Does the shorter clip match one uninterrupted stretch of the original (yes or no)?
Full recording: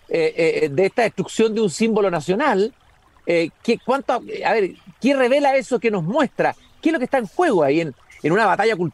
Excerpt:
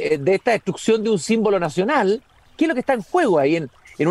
no